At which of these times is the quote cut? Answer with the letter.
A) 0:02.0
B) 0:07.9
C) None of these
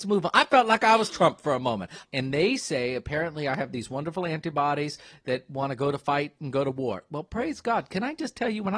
A